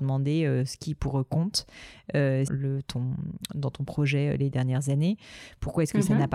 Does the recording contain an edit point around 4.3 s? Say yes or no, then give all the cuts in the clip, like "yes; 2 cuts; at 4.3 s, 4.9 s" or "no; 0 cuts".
no; 1 cut; at 2.5 s